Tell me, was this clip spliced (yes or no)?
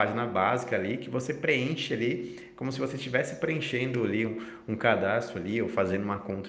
no